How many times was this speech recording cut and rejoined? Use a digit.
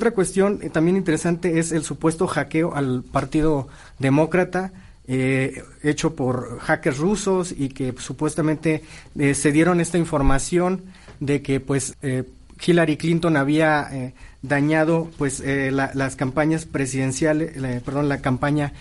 1